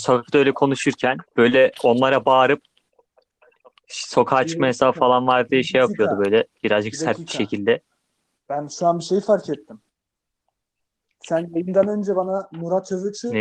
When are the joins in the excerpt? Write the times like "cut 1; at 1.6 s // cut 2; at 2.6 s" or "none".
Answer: cut 1; at 1.3 s